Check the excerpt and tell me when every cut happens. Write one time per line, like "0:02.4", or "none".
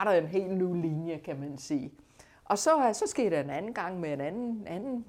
none